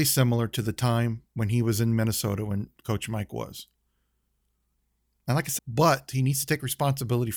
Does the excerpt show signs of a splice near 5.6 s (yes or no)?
yes